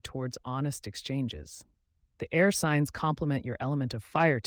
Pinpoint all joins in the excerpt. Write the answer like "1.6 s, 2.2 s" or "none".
2.1 s